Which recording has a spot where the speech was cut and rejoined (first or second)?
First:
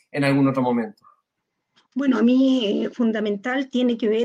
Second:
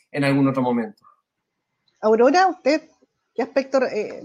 first